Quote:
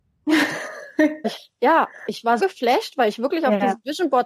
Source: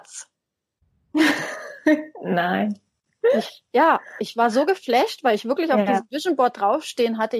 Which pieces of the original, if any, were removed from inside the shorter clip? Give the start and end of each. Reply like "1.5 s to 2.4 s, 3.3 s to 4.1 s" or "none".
2.1 s to 3.4 s, 4.5 s to 4.7 s

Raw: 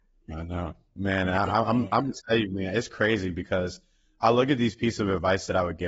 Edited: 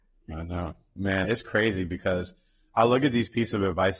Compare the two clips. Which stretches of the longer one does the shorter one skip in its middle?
1.2 s to 2.7 s

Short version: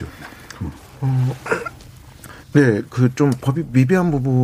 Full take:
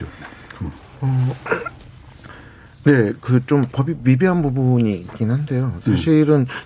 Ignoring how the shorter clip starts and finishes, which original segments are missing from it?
2.4 s to 2.7 s

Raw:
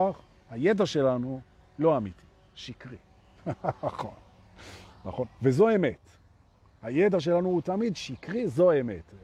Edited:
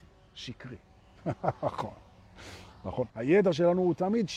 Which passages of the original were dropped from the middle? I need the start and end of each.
5.3 s to 6.8 s

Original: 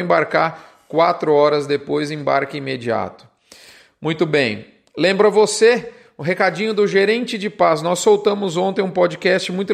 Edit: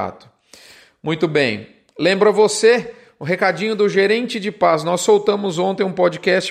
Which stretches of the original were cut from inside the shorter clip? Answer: none

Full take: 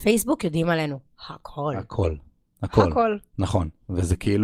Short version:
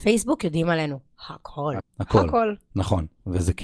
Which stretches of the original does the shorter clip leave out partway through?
1.8 s to 2.4 s

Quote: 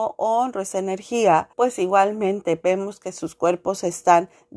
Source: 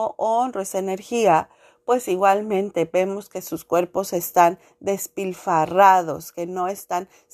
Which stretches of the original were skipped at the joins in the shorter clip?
1.5 s to 1.8 s

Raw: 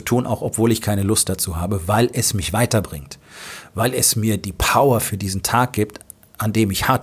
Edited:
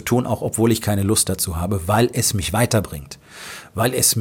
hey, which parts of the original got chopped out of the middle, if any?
none

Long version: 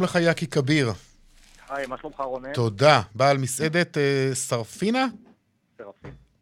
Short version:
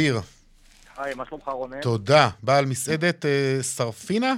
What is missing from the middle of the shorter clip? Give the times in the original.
none

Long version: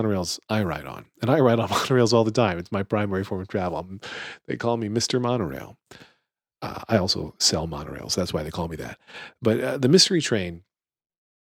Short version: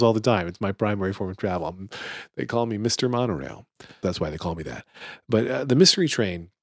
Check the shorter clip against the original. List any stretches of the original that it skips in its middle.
6.1 s to 8.2 s

